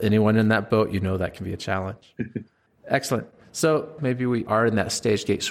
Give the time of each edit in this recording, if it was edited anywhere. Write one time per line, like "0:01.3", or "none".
0:04.0